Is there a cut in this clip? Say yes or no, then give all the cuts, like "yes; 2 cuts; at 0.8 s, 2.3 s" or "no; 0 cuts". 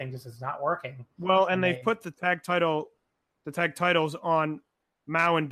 no; 0 cuts